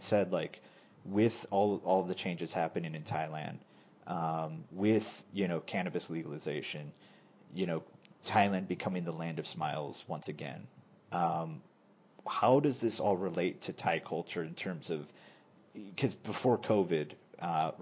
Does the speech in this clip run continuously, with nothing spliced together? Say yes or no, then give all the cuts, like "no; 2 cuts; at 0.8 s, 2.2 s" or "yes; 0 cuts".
yes; 0 cuts